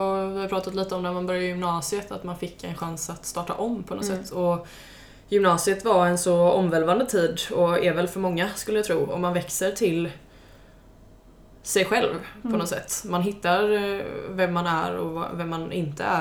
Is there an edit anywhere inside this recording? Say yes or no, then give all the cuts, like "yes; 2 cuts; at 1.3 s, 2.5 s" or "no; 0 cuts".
no; 0 cuts